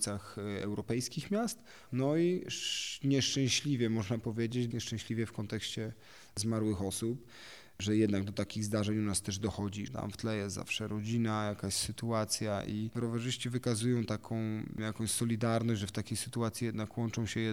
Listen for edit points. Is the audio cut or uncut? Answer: cut